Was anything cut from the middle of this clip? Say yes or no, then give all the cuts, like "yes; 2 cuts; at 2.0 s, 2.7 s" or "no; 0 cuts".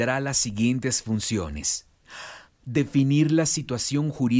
yes; 1 cut; at 2.5 s